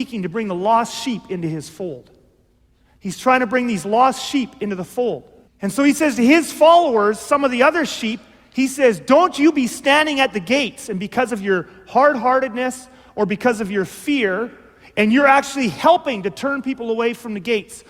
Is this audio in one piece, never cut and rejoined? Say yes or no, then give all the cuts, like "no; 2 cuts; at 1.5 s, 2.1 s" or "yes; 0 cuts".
no; 1 cut; at 5.5 s